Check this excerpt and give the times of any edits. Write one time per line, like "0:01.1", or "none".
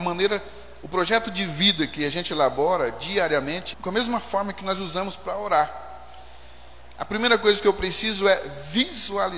0:03.7